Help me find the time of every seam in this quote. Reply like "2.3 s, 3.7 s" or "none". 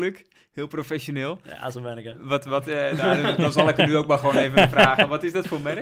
none